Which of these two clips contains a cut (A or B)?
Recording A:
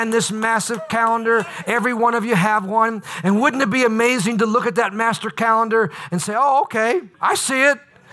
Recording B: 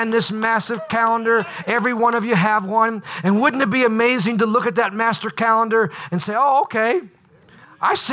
A